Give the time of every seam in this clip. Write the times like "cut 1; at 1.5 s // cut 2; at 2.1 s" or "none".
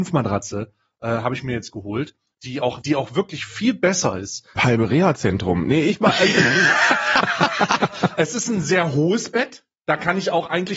cut 1; at 2.8 s // cut 2; at 4.6 s